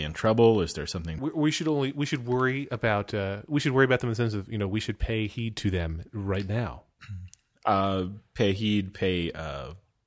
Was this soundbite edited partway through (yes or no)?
yes